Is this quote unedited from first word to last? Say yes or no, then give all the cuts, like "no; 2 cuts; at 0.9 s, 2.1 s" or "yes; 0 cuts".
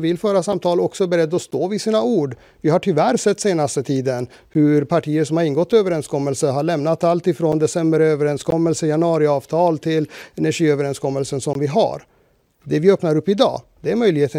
no; 1 cut; at 12.5 s